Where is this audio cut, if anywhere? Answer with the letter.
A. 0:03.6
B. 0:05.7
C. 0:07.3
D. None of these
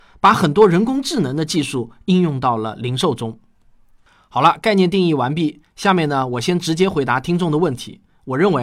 D